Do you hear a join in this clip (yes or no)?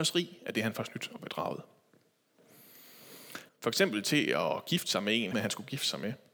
yes